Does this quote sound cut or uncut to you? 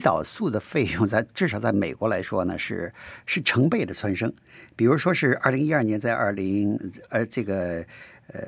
uncut